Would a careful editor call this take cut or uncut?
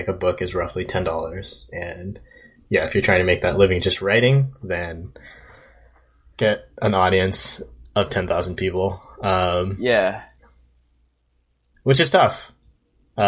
uncut